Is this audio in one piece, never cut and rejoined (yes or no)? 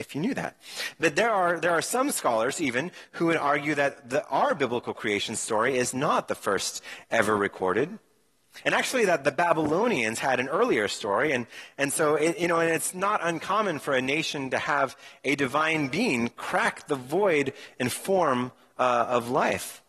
yes